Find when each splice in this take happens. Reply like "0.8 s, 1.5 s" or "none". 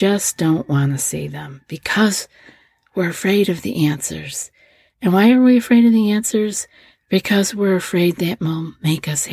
none